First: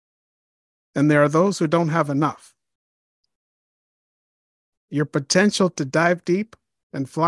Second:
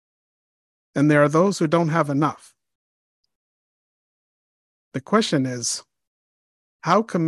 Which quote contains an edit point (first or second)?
first